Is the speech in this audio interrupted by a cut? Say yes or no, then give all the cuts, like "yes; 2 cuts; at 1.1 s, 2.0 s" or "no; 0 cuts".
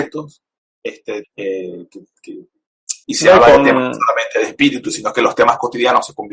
yes; 2 cuts; at 1.2 s, 3.0 s